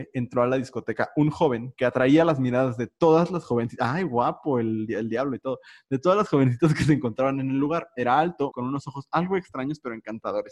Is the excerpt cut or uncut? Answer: cut